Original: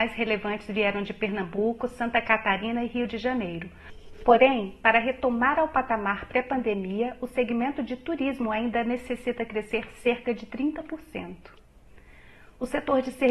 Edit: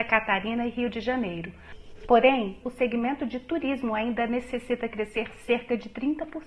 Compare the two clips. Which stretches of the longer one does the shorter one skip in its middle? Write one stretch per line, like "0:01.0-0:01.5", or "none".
0:04.8-0:07.2